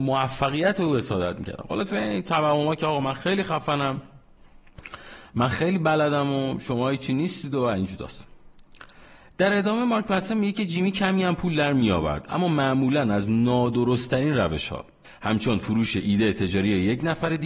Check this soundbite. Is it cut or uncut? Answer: uncut